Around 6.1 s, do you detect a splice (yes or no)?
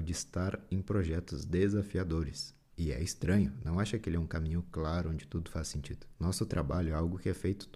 yes